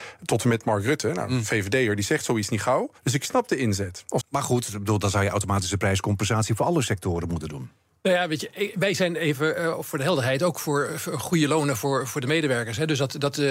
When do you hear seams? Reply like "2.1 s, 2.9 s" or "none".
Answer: 3.0 s, 4.2 s